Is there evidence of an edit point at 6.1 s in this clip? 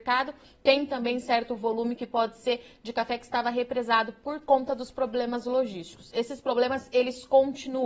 no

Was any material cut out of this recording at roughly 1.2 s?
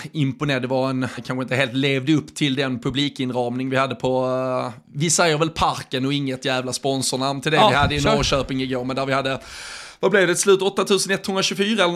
yes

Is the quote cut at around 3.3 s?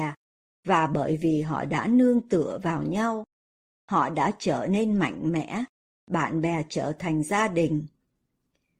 no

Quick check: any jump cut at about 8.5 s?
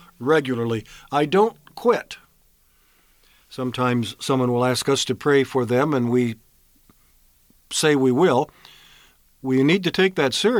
no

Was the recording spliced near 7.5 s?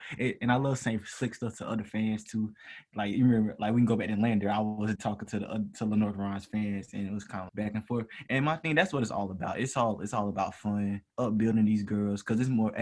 yes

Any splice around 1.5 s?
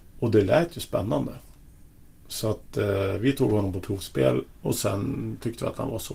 no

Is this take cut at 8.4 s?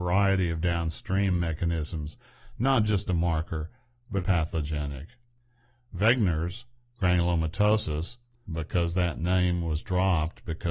yes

